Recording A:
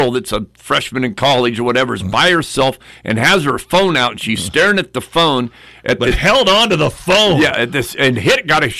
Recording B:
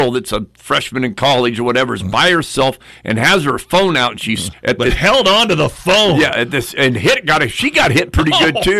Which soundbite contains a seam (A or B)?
B